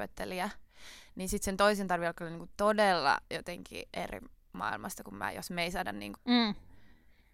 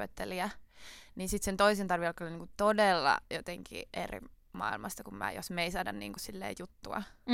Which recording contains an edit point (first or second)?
first